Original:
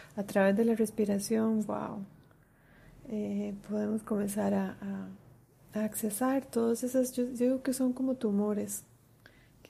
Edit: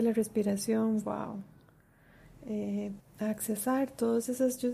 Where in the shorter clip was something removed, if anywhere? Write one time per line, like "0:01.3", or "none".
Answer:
0:03.0